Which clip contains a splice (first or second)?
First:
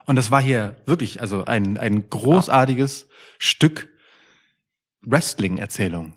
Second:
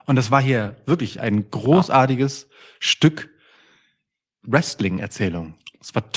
second